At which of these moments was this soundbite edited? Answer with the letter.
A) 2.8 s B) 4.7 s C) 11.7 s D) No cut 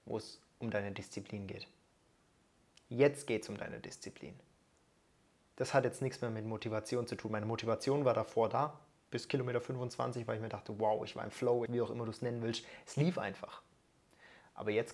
C